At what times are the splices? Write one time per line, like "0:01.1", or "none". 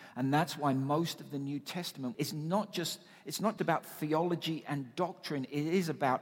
0:02.1
0:03.6